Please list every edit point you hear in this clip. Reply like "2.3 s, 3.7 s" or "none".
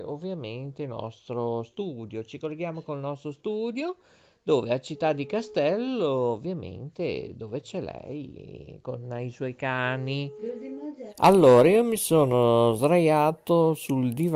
11.1 s